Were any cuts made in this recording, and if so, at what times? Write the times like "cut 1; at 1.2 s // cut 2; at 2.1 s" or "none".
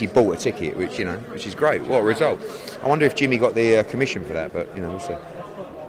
none